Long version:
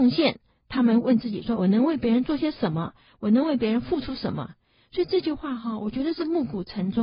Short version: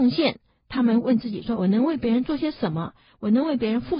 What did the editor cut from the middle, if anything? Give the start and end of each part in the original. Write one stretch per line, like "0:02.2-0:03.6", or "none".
none